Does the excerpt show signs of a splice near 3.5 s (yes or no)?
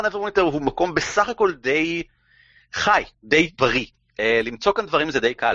yes